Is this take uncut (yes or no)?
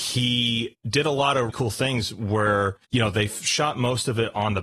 no